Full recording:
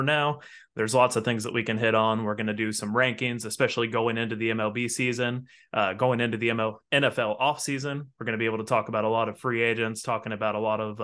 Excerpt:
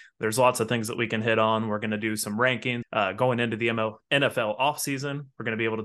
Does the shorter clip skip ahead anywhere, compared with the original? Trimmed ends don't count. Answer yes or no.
yes